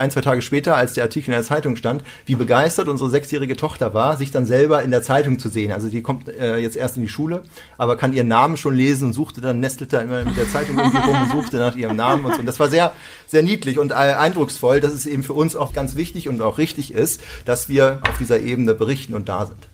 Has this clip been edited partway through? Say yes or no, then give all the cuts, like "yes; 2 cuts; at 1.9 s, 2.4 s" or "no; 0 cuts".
yes; 2 cuts; at 15.7 s, 18.0 s